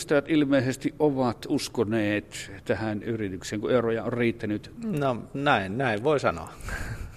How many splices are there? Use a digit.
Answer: 1